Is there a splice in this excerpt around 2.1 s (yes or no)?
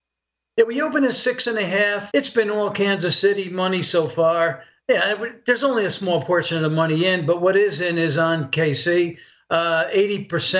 yes